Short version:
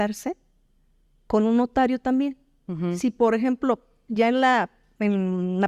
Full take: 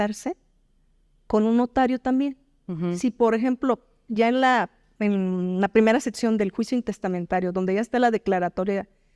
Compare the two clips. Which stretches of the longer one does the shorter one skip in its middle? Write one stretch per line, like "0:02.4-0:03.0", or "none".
none